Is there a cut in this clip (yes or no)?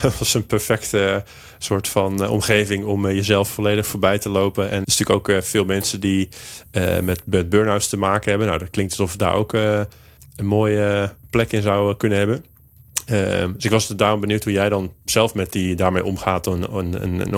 yes